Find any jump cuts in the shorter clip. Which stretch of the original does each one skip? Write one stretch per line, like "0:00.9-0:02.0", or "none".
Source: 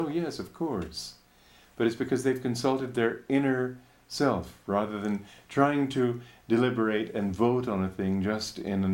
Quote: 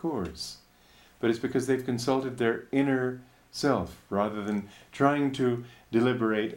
none